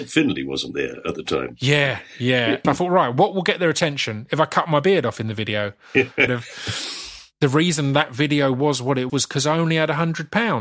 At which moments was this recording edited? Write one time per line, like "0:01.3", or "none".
0:02.6
0:06.3
0:09.1